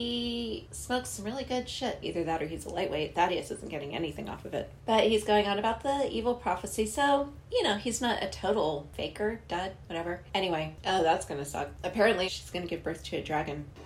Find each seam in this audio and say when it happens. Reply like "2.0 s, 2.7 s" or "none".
2.0 s, 12.3 s